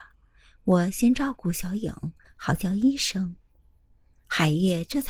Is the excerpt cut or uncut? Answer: cut